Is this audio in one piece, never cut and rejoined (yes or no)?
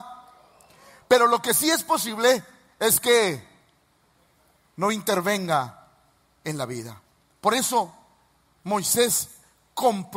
no